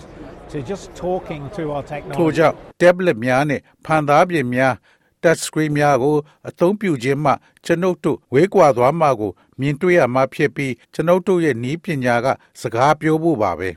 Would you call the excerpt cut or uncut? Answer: cut